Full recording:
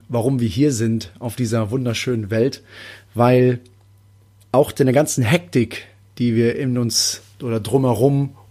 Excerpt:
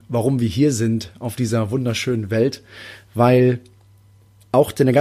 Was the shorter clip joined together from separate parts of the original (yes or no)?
no